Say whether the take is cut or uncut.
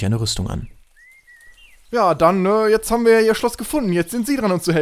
uncut